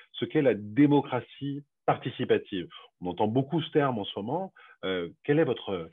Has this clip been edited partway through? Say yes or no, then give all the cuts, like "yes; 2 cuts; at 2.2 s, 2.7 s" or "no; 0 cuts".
no; 0 cuts